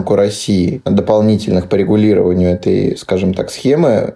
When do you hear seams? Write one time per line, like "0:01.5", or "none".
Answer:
none